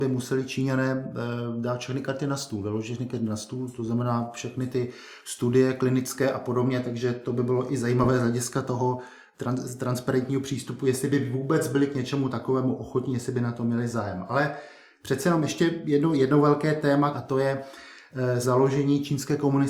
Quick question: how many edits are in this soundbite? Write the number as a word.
two